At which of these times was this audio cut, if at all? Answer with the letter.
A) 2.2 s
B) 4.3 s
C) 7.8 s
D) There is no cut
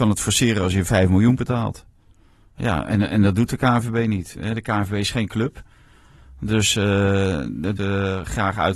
C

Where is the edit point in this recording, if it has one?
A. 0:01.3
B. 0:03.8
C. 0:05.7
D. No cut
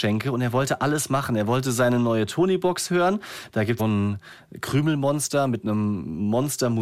B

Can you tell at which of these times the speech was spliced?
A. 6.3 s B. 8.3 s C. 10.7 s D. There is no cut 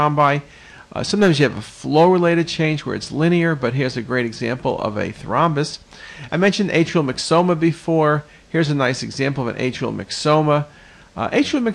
A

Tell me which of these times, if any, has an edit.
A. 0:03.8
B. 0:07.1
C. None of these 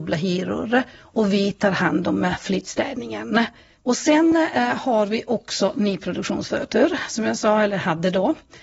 C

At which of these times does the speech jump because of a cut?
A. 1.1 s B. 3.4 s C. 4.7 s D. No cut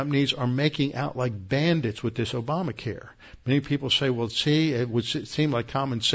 D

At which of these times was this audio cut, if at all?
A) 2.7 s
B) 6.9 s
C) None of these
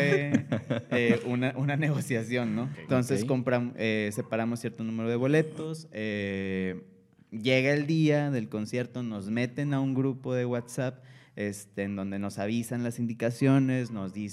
A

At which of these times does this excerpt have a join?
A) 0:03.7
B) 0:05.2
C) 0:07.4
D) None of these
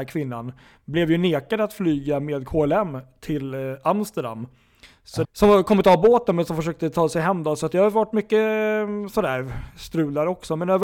B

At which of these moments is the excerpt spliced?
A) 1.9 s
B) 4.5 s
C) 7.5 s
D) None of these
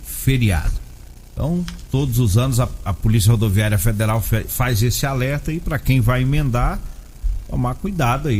D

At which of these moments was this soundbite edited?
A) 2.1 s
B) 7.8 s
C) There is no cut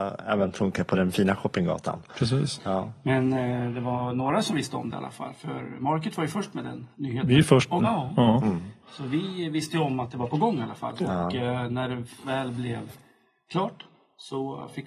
B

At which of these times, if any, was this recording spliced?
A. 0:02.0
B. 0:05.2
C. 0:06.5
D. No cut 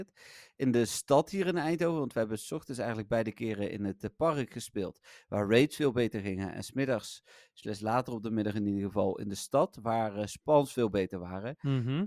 D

